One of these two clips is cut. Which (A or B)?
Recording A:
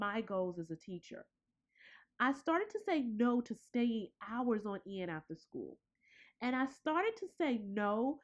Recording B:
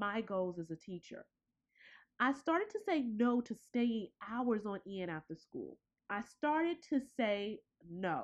B